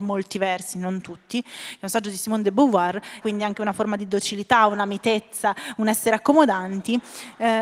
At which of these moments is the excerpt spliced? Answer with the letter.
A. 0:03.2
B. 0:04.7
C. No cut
A